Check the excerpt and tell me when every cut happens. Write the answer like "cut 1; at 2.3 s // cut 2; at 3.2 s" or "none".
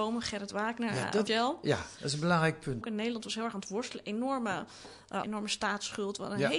cut 1; at 1.3 s // cut 2; at 2.8 s // cut 3; at 5.2 s